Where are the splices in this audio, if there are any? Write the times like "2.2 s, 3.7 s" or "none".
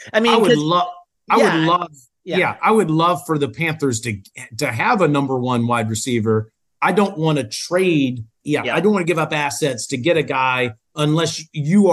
8.4 s